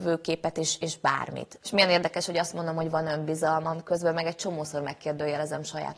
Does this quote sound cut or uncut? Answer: cut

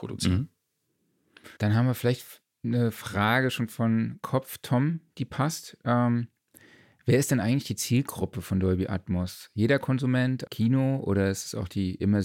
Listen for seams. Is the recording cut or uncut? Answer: cut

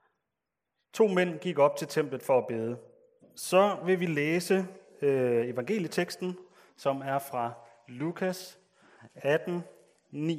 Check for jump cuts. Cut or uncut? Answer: cut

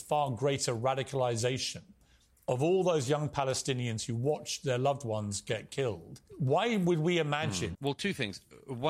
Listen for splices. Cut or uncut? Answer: cut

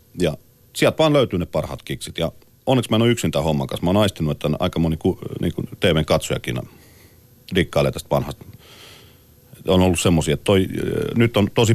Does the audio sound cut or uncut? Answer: uncut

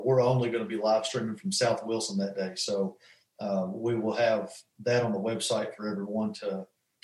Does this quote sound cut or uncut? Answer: uncut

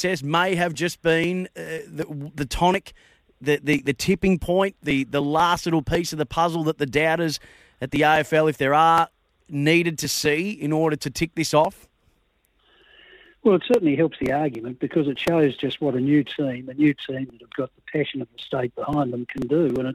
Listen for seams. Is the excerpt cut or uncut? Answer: uncut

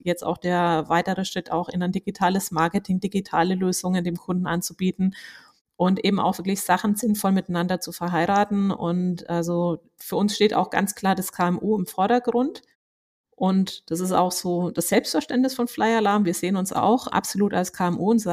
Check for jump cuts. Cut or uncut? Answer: cut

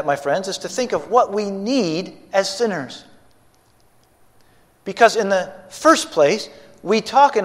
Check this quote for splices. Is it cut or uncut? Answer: uncut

